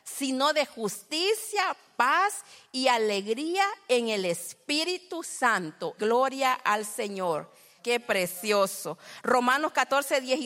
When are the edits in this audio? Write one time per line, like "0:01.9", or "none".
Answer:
0:06.0
0:07.8